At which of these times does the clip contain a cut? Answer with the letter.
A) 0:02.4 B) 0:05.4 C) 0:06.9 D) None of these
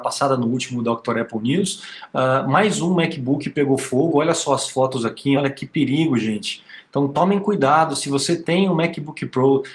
D